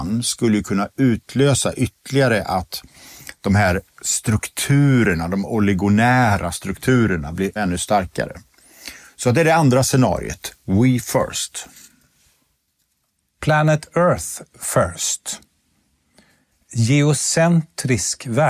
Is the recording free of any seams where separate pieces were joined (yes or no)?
no